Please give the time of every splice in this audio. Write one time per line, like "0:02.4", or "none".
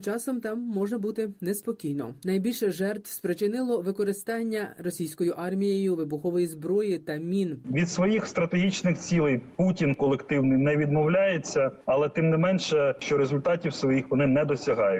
0:02.2
0:07.6
0:13.0